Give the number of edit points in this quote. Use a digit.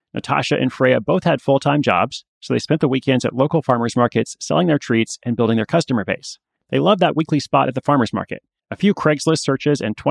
2